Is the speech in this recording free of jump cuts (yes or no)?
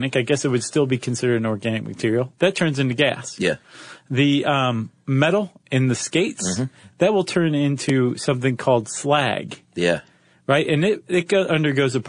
yes